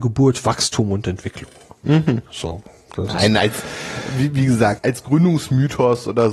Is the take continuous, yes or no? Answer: no